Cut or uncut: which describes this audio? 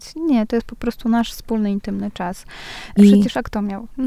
cut